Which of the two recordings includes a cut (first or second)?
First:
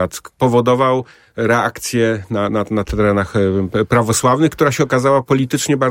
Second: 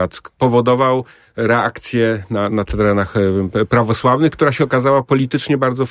second